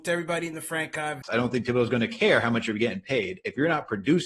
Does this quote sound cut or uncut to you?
cut